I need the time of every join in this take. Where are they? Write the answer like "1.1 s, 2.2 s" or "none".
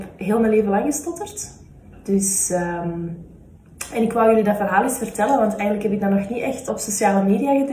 6.7 s

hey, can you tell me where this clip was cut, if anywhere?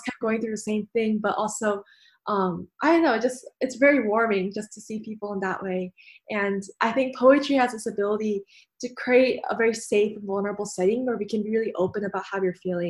none

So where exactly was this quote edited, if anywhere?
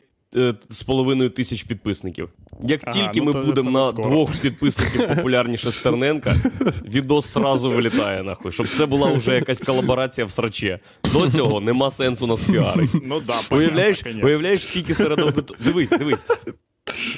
none

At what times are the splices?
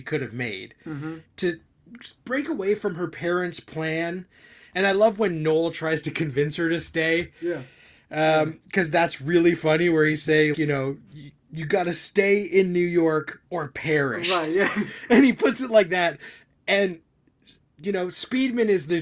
10.5 s

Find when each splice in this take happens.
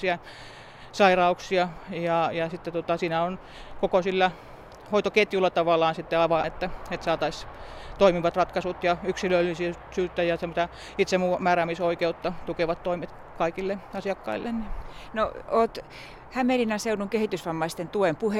6.4 s

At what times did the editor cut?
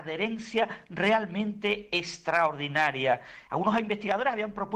3.5 s

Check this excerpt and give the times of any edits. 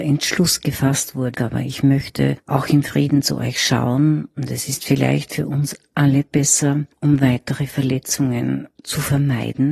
1.3 s

